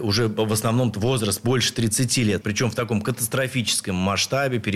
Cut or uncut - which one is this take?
cut